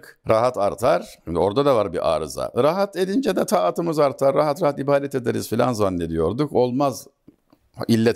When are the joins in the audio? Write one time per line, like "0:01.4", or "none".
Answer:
0:01.2